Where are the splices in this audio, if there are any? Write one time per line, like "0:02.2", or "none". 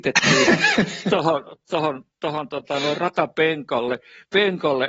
none